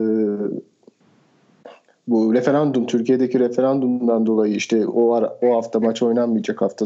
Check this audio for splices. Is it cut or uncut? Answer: uncut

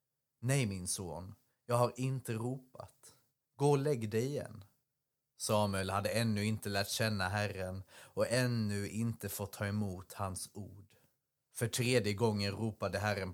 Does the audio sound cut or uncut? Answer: uncut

